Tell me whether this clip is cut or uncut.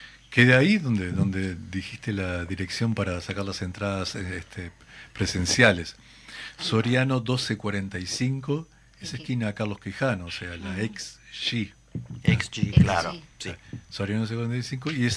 uncut